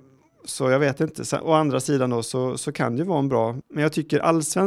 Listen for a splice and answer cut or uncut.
cut